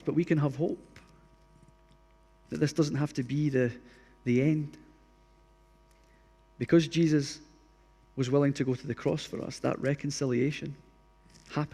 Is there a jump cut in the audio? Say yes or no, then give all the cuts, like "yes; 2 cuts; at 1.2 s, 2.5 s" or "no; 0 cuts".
no; 0 cuts